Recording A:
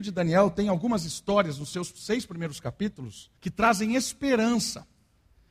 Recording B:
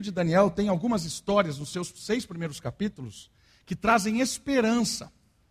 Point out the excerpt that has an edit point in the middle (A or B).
A